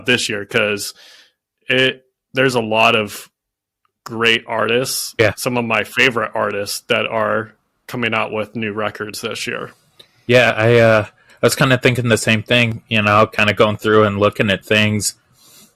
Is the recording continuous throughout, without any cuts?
yes; 0 cuts

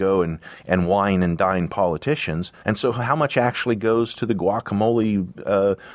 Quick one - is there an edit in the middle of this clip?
yes; 1 cut; at 2.6 s

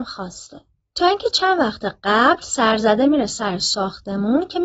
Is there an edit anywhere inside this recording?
yes; 1 cut; at 0.9 s

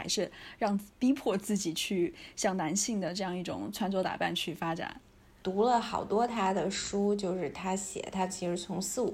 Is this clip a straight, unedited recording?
no; 1 cut; at 5.4 s

